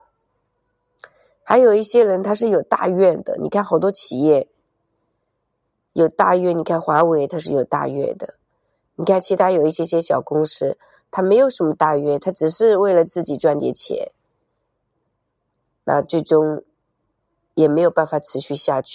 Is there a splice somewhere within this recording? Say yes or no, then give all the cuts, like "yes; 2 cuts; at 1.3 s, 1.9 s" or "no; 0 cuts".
no; 0 cuts